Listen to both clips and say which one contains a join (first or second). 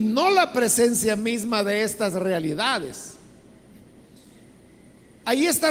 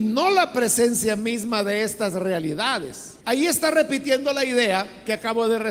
second